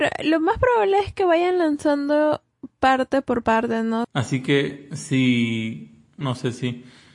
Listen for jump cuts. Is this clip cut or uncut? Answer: cut